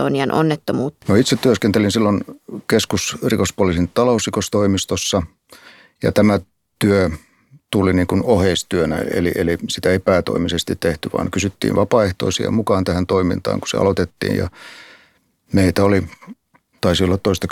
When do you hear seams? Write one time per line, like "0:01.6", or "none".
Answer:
0:01.0